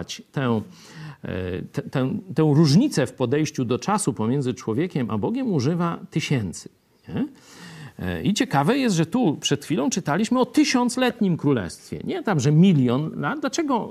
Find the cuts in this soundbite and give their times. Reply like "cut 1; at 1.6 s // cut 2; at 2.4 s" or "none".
none

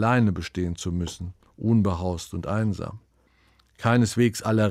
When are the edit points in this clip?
none

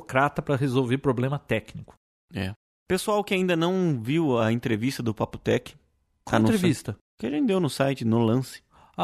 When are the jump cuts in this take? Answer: cut 1; at 7.1 s

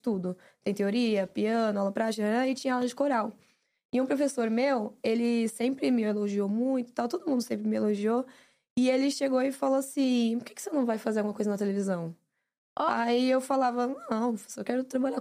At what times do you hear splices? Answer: none

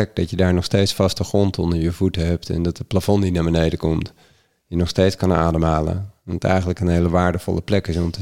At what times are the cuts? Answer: none

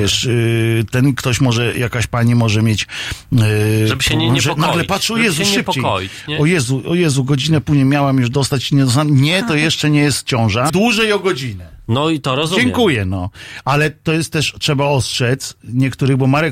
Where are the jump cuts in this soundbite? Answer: cut 1; at 10.7 s

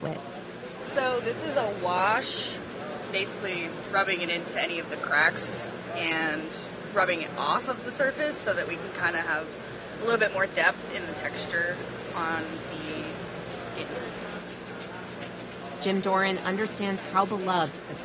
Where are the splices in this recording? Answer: none

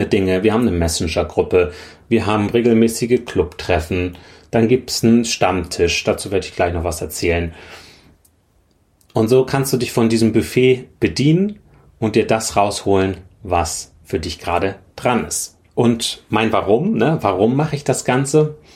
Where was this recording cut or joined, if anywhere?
none

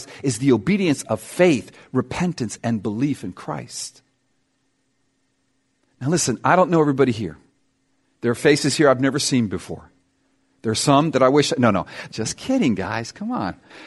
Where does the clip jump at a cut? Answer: cut 1; at 12.1 s

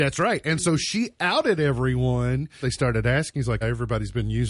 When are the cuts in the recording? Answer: cut 1; at 2.6 s // cut 2; at 3.6 s

